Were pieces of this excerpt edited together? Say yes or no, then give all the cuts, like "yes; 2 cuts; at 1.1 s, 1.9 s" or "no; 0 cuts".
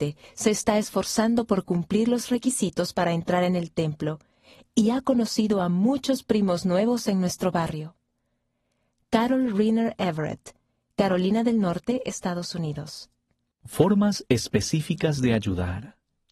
no; 0 cuts